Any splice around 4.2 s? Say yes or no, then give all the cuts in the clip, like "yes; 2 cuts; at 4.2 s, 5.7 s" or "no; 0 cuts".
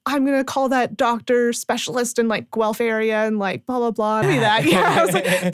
yes; 1 cut; at 4.2 s